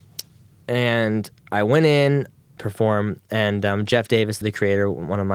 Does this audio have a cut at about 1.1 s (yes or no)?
no